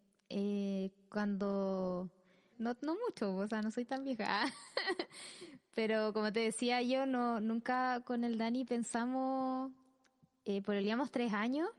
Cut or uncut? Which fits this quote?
cut